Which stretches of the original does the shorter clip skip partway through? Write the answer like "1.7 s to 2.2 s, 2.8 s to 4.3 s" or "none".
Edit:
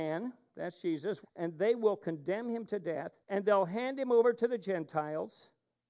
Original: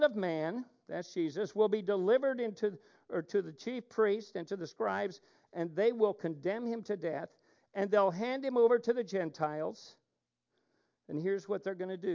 1.5 s to 5.4 s, 7.4 s to 7.7 s

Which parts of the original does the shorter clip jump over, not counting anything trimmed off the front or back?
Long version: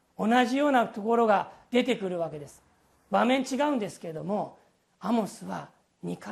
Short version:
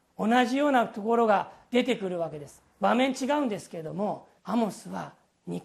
2.7 s to 3.0 s, 4.7 s to 4.9 s

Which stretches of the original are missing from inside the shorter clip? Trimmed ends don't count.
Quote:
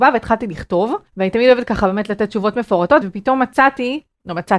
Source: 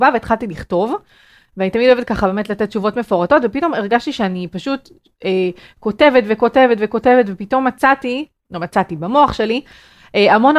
1.1 s to 1.5 s, 3.4 s to 7.3 s

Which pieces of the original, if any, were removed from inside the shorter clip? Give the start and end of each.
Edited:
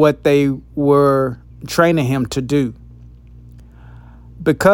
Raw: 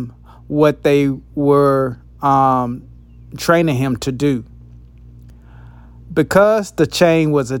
2.1 s to 3.2 s

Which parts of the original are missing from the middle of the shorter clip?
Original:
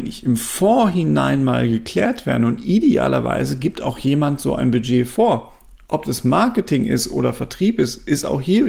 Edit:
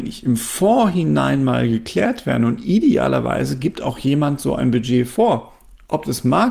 none

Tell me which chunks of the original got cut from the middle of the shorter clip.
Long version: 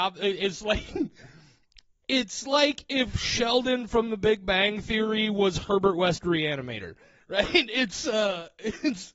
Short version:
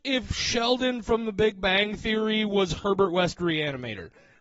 none

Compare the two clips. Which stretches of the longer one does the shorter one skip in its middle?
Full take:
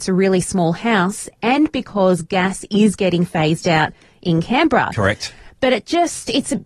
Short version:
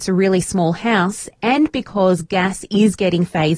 none

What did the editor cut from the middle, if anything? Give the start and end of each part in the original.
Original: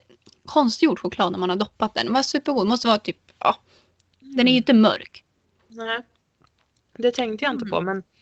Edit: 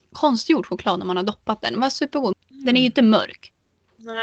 2.7 s to 4.0 s

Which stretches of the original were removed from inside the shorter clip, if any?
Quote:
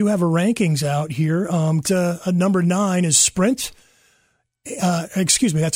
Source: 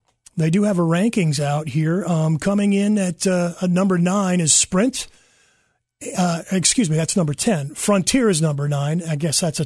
2.4 s to 3.2 s

